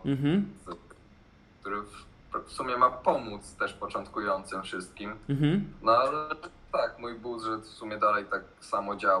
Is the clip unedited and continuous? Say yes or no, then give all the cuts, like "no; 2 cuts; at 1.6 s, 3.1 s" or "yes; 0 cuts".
yes; 0 cuts